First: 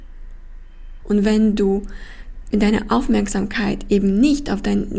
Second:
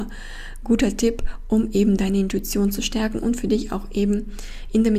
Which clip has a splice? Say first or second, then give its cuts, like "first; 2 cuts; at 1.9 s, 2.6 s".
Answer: first; 1 cut; at 1.0 s